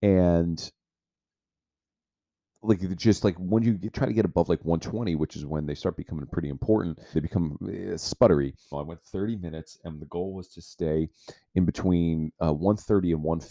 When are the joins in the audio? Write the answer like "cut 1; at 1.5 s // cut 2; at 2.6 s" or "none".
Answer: cut 1; at 7.1 s // cut 2; at 8.7 s